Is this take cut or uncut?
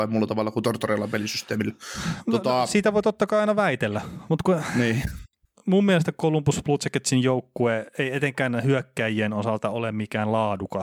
uncut